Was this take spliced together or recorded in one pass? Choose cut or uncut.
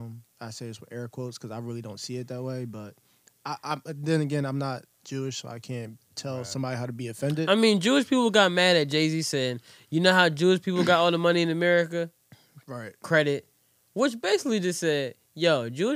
uncut